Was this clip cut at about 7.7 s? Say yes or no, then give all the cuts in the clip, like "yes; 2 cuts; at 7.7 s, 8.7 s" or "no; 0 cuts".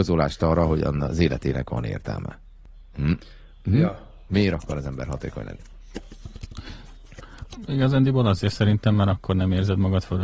no; 1 cut; at 4.3 s